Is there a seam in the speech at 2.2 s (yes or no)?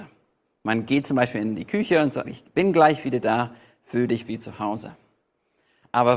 yes